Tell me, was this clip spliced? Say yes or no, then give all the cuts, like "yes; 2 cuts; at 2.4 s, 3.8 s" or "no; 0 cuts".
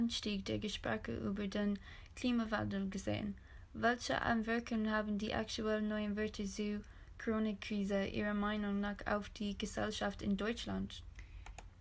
no; 0 cuts